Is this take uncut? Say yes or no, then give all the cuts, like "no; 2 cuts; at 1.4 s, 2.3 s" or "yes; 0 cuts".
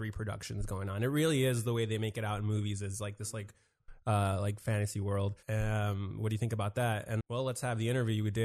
no; 2 cuts; at 5.4 s, 7.2 s